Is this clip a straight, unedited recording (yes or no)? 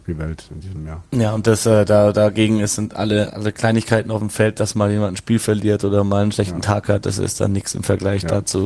yes